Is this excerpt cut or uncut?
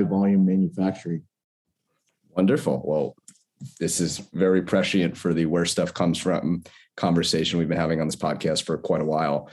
uncut